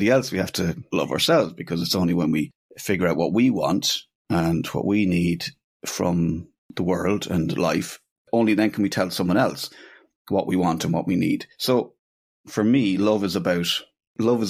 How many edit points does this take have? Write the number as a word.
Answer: zero